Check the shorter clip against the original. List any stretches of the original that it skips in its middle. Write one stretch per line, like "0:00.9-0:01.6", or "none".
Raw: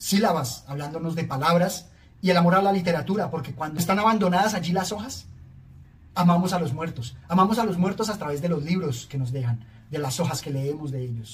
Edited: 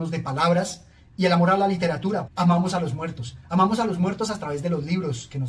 0:03.3-0:06.1